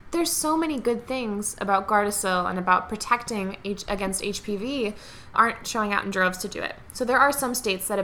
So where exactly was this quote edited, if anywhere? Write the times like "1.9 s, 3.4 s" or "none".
5.3 s